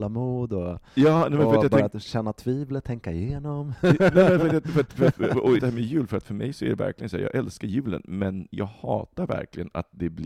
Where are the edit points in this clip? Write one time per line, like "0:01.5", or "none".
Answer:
0:05.6